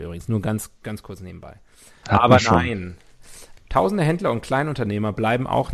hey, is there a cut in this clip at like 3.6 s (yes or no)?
yes